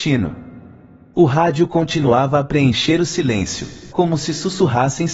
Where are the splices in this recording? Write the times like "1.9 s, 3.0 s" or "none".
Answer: 3.9 s